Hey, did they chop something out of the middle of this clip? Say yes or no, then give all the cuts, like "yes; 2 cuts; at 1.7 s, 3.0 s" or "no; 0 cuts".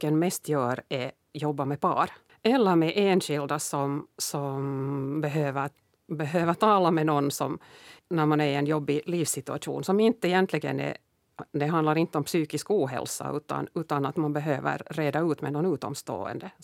yes; 2 cuts; at 2.3 s, 8.0 s